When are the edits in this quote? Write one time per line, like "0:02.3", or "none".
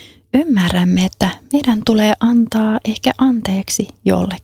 none